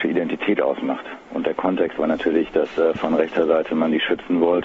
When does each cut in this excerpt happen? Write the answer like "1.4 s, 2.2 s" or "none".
none